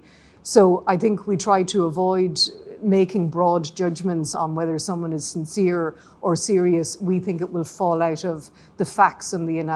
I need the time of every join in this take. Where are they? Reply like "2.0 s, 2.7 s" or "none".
4.3 s